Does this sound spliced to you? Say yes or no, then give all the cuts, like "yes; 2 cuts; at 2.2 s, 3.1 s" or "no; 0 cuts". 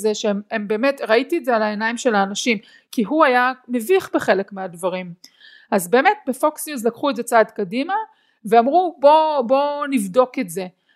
no; 0 cuts